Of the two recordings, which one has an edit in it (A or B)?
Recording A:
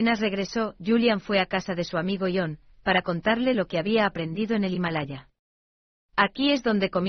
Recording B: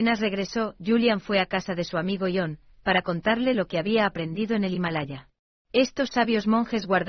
B